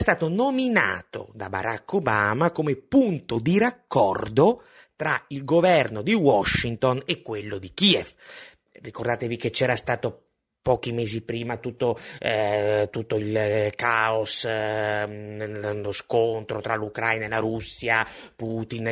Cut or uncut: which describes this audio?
uncut